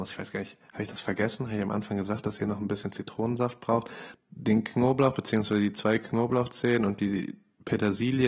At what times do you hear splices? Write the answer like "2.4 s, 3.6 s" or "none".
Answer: 4.1 s